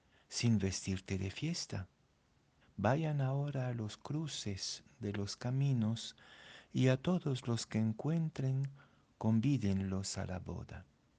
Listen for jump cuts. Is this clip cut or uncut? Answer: cut